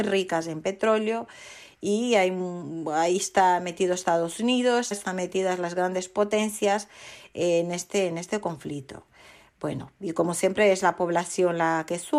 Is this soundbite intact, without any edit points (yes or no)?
no